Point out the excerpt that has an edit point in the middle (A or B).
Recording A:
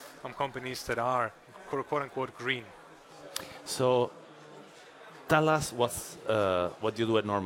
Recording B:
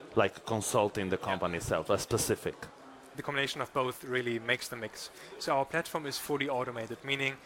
B